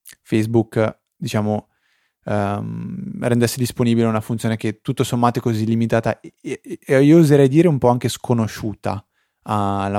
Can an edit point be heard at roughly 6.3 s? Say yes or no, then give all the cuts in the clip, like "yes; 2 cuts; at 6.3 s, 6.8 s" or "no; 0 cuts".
no; 0 cuts